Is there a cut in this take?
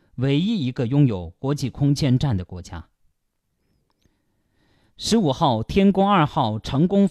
no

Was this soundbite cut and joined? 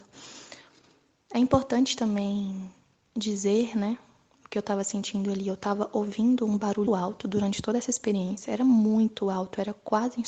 yes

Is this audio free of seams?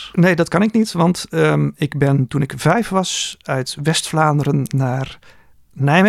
yes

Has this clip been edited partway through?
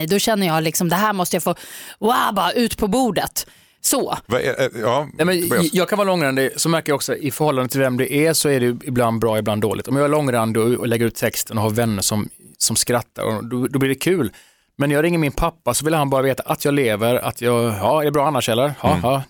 no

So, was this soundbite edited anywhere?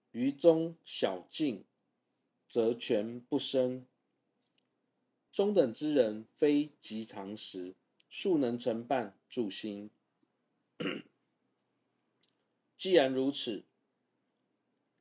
yes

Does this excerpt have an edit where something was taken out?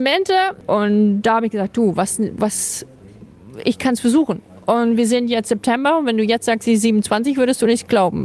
no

